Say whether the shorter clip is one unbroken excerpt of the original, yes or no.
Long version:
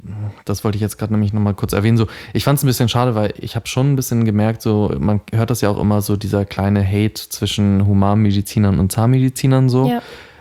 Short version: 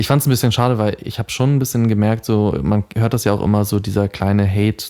yes